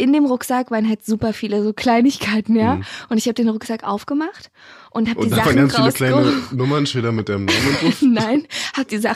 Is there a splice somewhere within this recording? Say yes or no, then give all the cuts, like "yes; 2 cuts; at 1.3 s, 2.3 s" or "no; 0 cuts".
no; 0 cuts